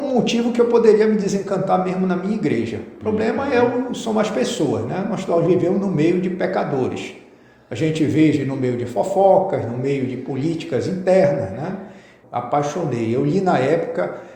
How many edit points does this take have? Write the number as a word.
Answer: one